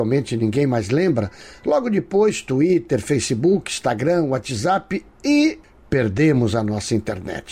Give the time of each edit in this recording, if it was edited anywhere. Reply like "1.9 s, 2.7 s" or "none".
none